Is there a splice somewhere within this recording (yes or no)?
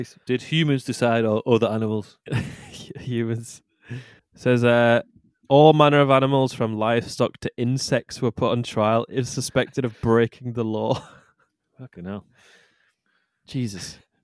yes